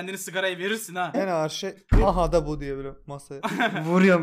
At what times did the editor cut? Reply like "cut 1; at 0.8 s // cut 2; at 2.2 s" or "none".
cut 1; at 1.1 s